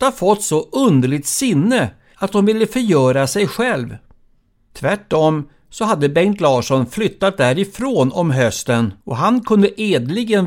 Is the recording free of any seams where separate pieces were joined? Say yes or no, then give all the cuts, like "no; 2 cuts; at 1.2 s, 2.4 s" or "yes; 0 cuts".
no; 2 cuts; at 4.5 s, 9.0 s